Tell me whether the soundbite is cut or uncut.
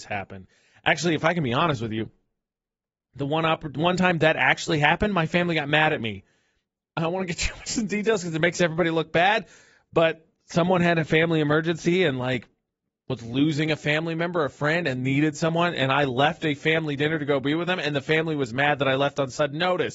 uncut